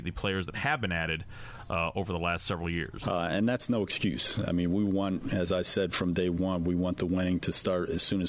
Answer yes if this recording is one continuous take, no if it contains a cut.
no